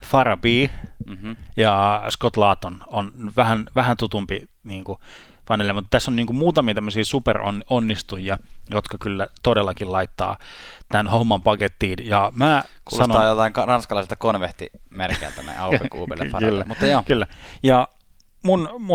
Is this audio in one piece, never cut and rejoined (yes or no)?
yes